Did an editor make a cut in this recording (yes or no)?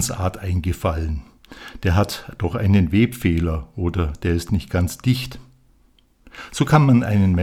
no